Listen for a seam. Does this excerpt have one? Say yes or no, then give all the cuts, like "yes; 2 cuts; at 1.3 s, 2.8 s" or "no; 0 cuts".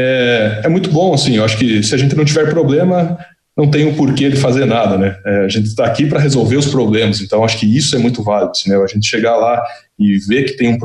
no; 0 cuts